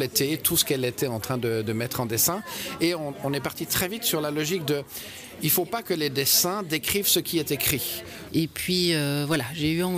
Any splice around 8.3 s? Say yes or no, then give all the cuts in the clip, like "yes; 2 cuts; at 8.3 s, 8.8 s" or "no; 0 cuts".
yes; 1 cut; at 8.3 s